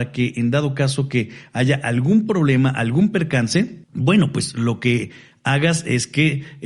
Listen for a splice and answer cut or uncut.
cut